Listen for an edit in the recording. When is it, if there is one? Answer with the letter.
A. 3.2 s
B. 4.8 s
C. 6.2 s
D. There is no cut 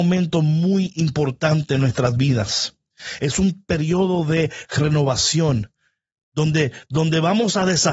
C